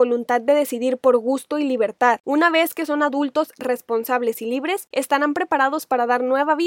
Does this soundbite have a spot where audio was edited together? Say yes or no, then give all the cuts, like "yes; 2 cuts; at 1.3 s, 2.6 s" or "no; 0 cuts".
yes; 1 cut; at 2.2 s